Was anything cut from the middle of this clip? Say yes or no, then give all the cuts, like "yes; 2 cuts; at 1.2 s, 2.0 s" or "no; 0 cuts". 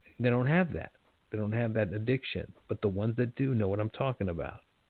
no; 0 cuts